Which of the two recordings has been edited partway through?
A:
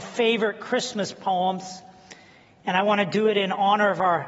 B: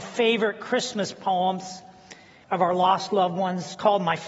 B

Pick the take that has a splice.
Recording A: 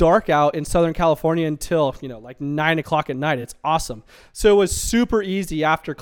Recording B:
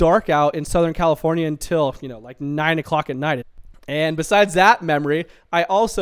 B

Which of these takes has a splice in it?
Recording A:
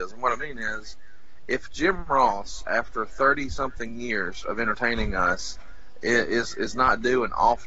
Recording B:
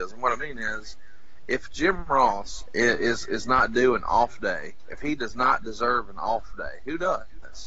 B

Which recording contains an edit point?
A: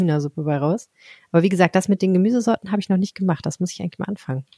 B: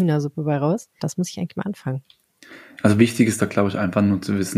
B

